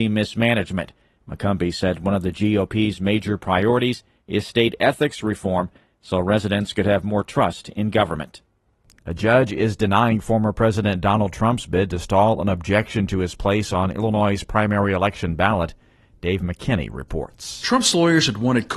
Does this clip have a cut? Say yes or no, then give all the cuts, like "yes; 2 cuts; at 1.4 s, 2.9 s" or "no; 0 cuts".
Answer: no; 0 cuts